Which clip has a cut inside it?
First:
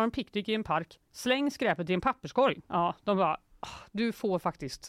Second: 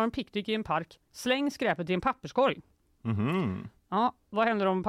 first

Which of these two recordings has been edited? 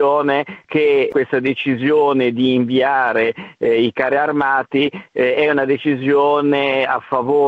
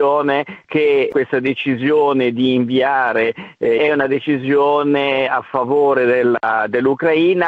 second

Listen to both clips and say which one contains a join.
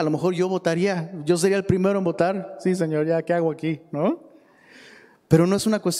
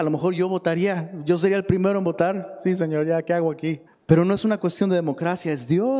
second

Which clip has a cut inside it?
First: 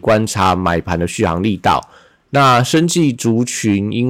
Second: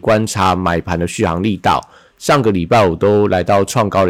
first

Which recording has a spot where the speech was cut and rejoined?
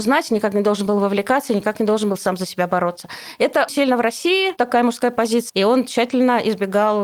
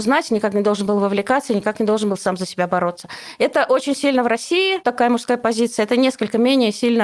first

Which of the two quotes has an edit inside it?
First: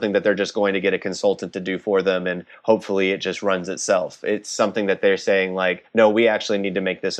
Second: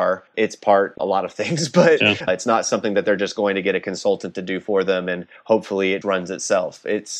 second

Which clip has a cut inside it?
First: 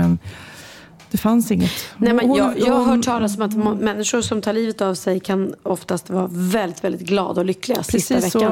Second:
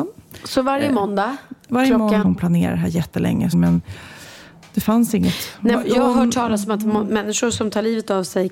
second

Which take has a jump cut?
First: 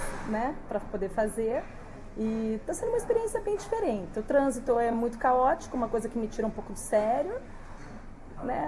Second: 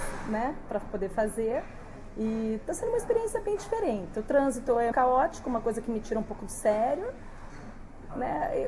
second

